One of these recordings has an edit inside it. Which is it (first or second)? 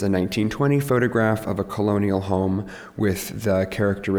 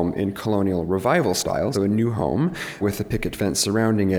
second